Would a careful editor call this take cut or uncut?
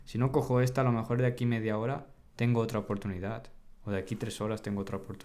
uncut